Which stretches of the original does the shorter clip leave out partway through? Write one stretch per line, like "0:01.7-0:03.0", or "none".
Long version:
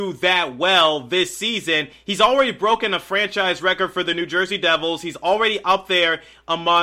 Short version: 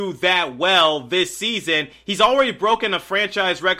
none